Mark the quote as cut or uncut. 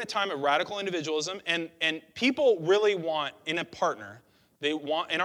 uncut